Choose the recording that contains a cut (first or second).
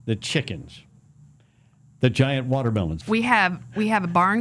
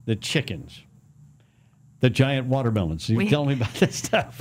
first